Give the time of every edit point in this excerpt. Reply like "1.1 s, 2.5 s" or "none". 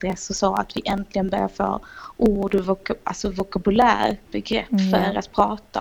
4.2 s